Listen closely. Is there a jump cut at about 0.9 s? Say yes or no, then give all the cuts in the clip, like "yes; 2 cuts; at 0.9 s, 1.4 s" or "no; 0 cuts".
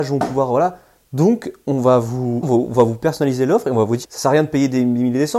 no; 2 cuts; at 2.4 s, 4.0 s